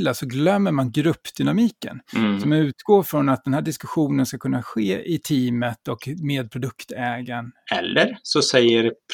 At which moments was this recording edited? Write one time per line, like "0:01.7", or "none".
0:07.7